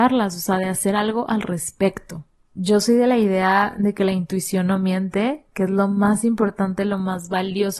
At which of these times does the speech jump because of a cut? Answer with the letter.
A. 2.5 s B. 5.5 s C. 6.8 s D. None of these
A